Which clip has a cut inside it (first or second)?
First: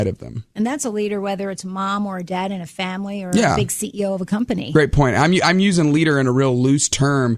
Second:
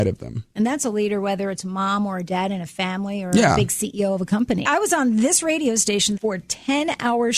second